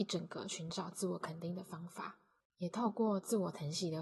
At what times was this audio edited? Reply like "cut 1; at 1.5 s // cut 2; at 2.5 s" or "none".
cut 1; at 2.4 s